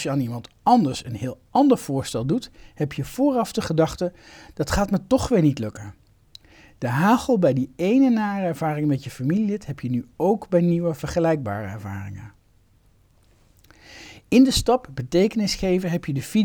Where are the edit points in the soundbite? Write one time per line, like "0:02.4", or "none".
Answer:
none

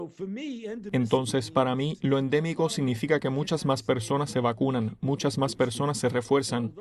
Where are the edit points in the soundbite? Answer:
none

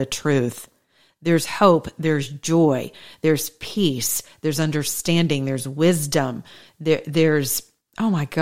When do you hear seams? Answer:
none

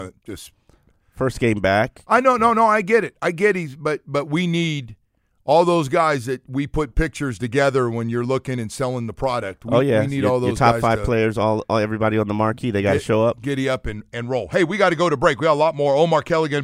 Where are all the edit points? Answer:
none

